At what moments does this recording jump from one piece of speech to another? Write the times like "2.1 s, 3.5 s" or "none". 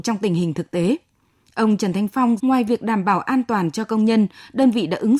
2.4 s